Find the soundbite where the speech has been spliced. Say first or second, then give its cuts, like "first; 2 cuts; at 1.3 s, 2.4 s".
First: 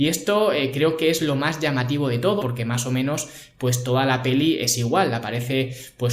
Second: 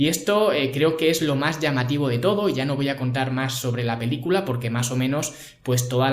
first; 1 cut; at 2.4 s